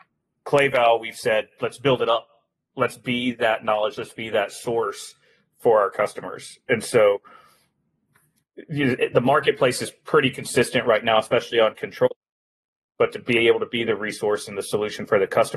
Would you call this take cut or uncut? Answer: uncut